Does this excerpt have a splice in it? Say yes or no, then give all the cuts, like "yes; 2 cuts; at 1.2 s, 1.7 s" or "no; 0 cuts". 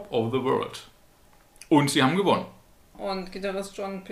no; 0 cuts